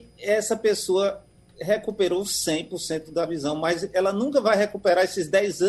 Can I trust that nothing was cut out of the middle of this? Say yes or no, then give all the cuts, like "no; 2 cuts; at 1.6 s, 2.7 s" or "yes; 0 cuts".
yes; 0 cuts